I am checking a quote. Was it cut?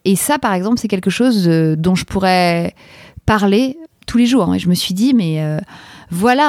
yes; 1 cut; at 4.5 s

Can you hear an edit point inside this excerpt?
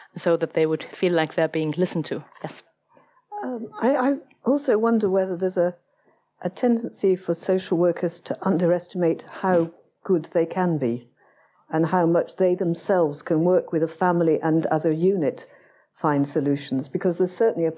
no; 0 cuts

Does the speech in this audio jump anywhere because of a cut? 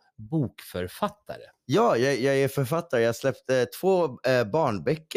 no; 0 cuts

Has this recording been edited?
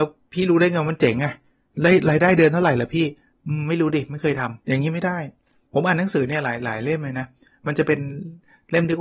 yes; 1 cut; at 4.6 s

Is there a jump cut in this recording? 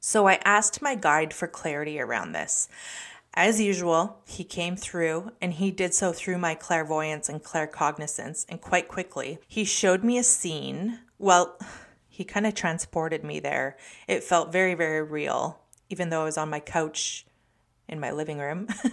no; 0 cuts

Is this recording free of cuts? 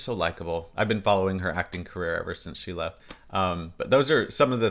yes; 0 cuts

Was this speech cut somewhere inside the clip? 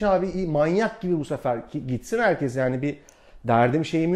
no; 0 cuts

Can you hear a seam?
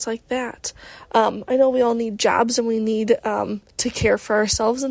no; 0 cuts

